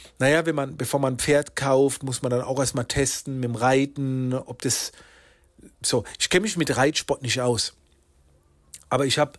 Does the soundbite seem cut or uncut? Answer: uncut